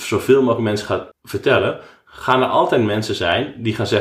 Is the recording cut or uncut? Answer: cut